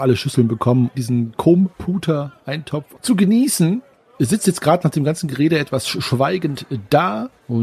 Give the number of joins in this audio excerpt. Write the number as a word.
one